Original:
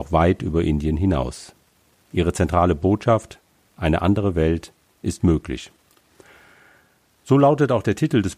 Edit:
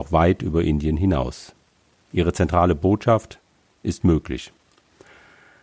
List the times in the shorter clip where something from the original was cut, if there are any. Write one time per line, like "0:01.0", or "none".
0:03.7